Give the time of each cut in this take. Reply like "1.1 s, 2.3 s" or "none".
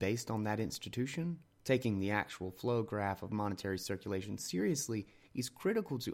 1.6 s